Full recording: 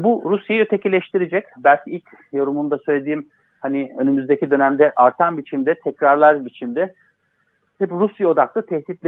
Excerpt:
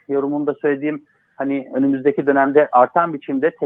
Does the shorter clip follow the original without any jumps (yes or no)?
yes